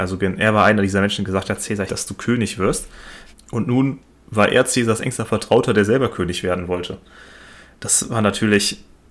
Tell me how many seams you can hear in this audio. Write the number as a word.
two